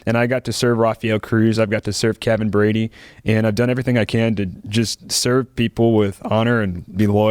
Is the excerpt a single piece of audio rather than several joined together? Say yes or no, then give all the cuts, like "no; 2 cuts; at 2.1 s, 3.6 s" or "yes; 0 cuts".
yes; 0 cuts